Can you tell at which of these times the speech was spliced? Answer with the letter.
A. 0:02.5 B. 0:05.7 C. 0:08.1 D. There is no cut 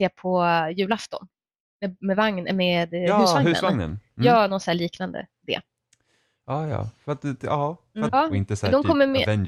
C